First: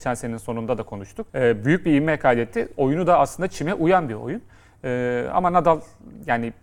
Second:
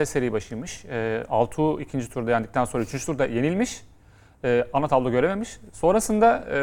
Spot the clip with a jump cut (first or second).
first